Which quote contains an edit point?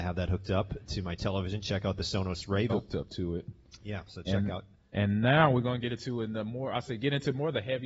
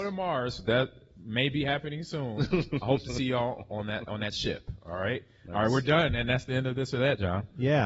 first; 1 cut; at 2.7 s

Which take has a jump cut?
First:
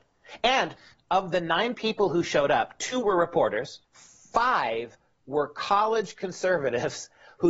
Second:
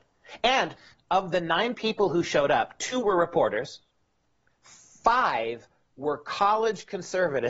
first; 1 cut; at 3.8 s

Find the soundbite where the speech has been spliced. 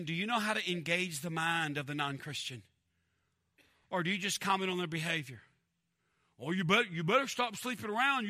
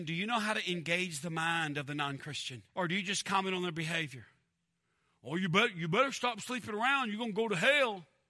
second; 1 cut; at 2.7 s

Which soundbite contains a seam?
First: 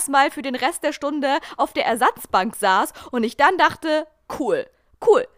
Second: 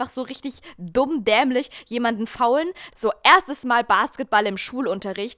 second; 1 cut; at 2.9 s

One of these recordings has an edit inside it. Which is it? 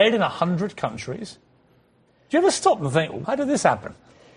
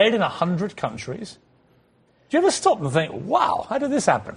first; 1 cut; at 3.2 s

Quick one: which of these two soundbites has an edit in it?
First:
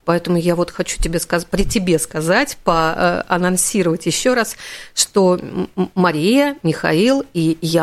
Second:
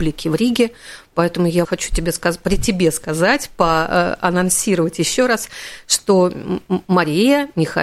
second; 1 cut; at 1.6 s

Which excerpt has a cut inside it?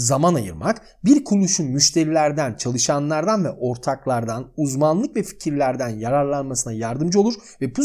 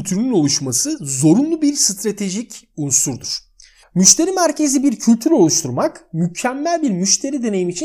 second; 1 cut; at 3.8 s

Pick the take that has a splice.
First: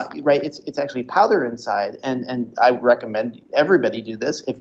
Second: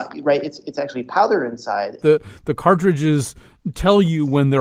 second; 1 cut; at 2.0 s

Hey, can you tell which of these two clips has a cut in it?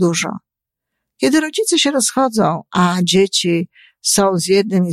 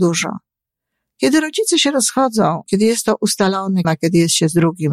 second; 2 cuts; at 2.6 s, 3.8 s

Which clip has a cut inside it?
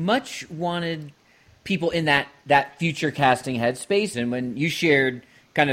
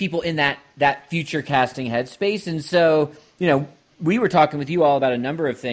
first; 1 cut; at 4.1 s

